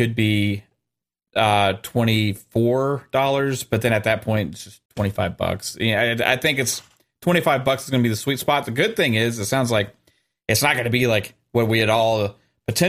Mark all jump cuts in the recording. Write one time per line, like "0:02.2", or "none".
0:04.9